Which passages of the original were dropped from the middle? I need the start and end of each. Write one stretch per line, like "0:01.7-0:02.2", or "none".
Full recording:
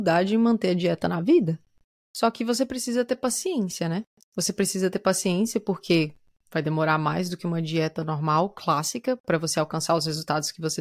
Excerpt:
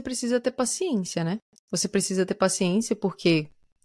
none